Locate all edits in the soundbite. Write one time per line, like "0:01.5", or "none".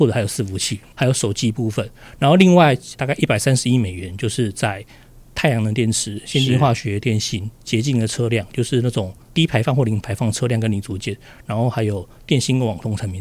none